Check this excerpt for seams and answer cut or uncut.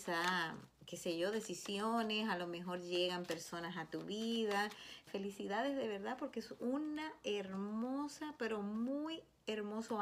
cut